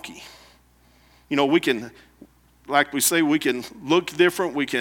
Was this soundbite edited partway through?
yes; 2 cuts; at 1.2 s, 2.6 s

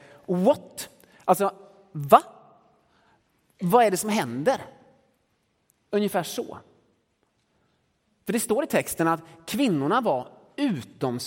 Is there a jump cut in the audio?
no; 0 cuts

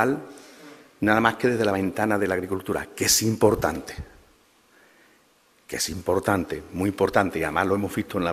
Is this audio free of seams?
yes; 0 cuts

